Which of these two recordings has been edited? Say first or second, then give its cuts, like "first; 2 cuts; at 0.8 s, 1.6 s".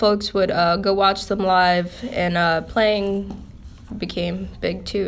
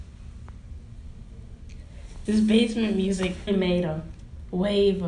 second; 2 cuts; at 2.3 s, 3.5 s